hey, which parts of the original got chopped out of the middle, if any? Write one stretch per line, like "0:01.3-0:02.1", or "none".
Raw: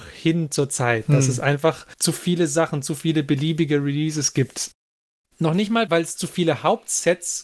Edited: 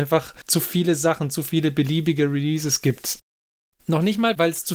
none